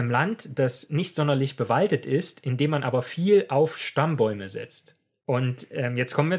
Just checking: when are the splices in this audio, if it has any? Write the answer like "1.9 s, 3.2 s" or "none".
5.2 s